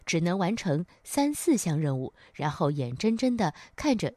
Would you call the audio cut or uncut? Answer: uncut